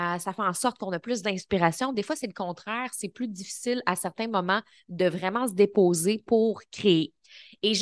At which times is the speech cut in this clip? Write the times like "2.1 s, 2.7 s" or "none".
none